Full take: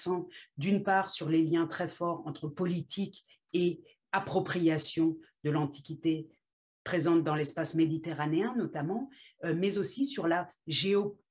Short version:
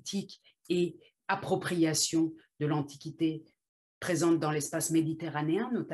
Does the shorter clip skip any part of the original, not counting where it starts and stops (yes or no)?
no